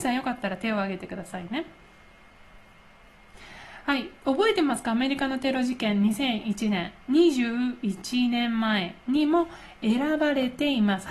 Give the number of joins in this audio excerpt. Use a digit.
0